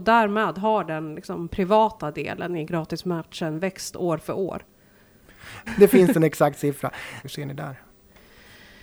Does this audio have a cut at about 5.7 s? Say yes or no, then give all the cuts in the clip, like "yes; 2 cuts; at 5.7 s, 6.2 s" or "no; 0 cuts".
yes; 2 cuts; at 5.7 s, 7.2 s